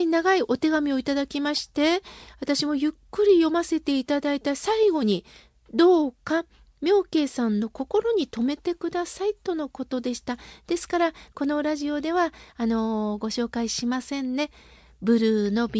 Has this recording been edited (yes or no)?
no